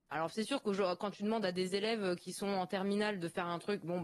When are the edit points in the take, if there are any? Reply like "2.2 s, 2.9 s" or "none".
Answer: none